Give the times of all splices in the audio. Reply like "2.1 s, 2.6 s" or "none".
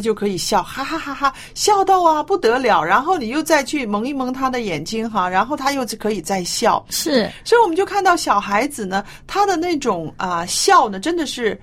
1.0 s